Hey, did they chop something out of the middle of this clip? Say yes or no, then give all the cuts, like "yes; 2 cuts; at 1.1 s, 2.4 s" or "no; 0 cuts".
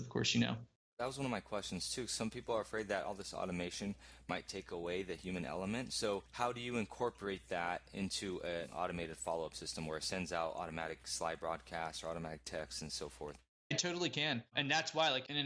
no; 0 cuts